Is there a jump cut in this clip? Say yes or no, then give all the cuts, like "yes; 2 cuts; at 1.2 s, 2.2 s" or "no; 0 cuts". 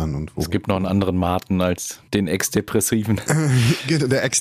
yes; 1 cut; at 2.1 s